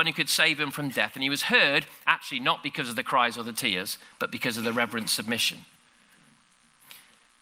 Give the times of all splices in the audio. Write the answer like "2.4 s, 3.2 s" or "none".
none